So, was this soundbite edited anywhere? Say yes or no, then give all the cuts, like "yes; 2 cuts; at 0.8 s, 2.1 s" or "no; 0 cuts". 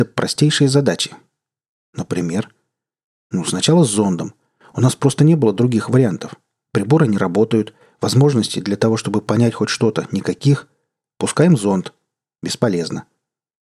no; 0 cuts